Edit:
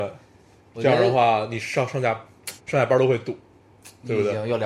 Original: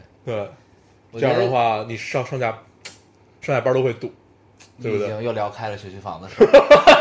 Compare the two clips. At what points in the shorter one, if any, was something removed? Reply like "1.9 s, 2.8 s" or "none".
2.6 s